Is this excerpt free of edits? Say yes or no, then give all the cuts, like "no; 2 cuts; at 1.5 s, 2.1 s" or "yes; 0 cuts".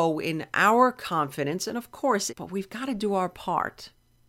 no; 1 cut; at 2.3 s